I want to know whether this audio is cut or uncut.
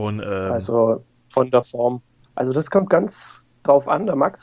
cut